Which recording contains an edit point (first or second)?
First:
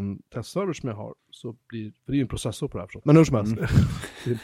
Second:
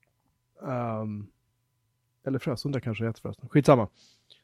first